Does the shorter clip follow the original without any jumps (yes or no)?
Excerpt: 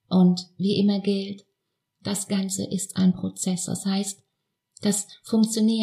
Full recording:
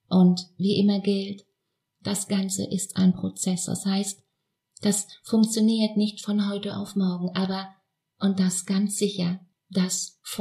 yes